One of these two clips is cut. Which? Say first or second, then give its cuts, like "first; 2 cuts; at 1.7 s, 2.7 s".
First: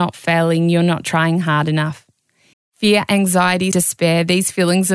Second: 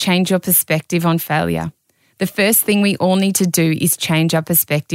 first; 2 cuts; at 2.5 s, 3.7 s